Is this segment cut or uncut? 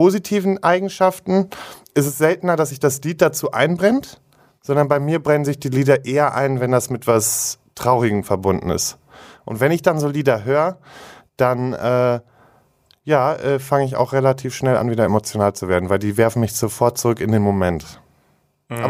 uncut